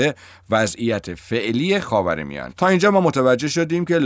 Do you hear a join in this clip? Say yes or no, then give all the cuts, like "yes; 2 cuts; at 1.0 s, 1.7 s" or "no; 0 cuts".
yes; 1 cut; at 2.5 s